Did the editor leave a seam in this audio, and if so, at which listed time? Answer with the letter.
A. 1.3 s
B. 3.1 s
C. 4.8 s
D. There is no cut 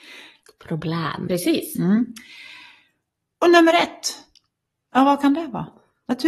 A